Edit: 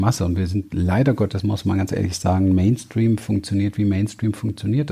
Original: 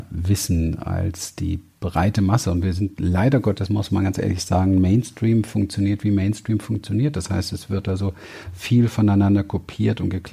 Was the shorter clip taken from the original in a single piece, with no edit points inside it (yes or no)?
yes